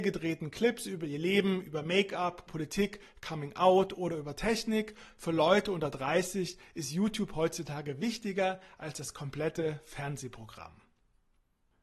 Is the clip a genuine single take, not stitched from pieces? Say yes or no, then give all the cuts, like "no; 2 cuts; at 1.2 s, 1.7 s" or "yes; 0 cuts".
no; 1 cut; at 2.5 s